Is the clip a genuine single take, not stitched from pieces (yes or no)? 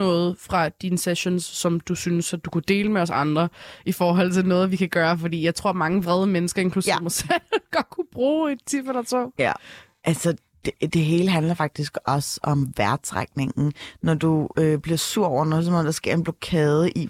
yes